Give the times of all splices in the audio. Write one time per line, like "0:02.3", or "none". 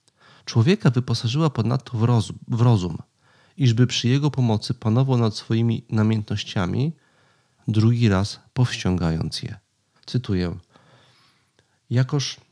0:07.6
0:10.0